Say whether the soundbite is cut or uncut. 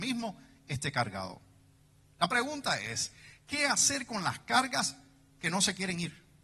uncut